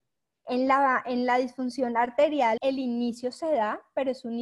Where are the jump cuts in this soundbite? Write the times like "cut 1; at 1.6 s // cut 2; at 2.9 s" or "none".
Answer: cut 1; at 2.6 s